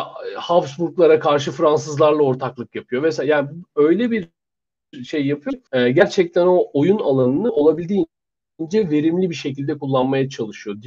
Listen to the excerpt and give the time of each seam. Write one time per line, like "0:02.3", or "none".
0:05.7